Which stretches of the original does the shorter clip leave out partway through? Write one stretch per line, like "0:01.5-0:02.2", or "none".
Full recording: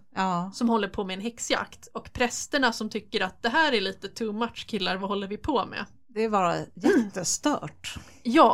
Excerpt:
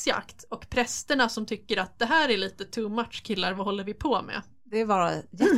none